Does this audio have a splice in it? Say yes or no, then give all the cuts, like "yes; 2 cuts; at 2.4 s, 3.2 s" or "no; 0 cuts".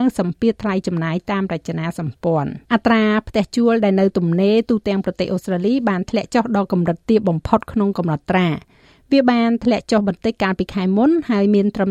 yes; 1 cut; at 2.6 s